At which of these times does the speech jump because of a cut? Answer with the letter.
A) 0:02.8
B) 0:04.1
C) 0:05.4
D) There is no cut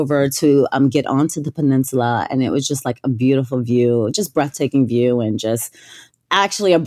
D